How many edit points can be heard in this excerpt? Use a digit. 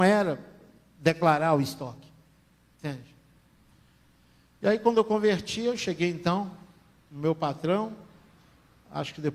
0